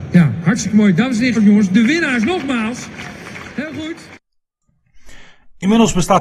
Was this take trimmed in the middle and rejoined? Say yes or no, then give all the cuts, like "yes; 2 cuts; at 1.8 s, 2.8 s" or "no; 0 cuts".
yes; 1 cut; at 1.4 s